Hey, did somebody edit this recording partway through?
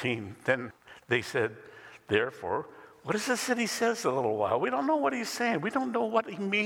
no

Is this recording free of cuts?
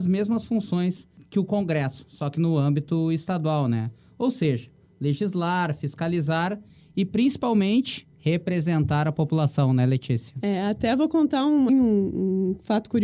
no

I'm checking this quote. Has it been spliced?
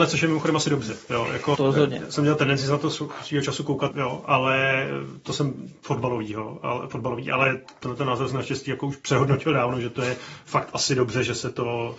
yes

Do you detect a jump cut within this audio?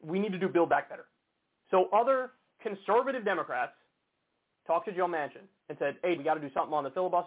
yes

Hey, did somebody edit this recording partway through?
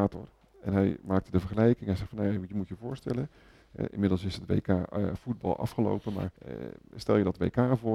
yes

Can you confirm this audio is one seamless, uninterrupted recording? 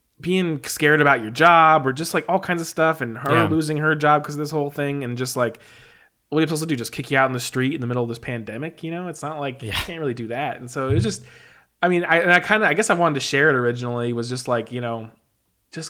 yes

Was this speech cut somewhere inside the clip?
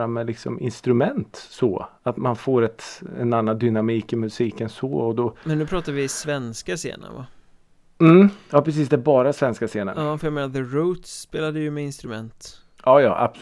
yes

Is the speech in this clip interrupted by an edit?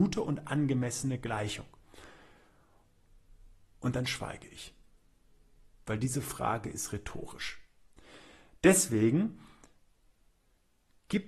no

